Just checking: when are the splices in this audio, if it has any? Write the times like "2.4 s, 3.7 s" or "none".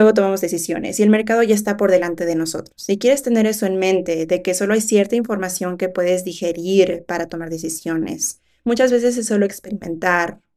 none